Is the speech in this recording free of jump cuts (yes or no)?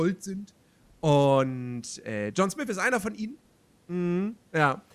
no